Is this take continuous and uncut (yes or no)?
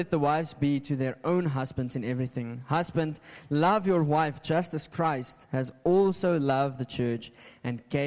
yes